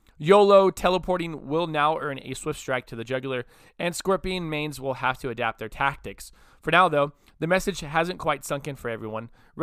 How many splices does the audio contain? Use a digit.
0